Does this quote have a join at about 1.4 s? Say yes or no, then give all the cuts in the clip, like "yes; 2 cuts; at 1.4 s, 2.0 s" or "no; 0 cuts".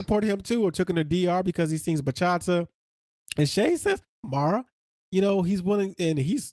no; 1 cut; at 4.2 s